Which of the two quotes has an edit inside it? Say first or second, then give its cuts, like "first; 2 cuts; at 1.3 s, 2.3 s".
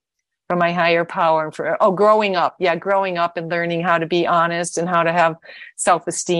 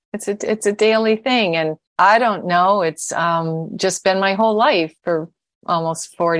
second; 2 cuts; at 1.9 s, 5.0 s